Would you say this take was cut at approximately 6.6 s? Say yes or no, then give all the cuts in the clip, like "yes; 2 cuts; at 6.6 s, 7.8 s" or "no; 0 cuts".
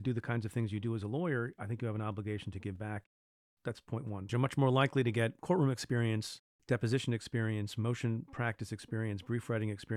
no; 1 cut; at 4.3 s